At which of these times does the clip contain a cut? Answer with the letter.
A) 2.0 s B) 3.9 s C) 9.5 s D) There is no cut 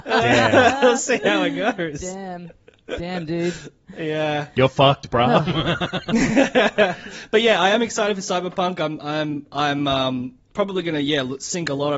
D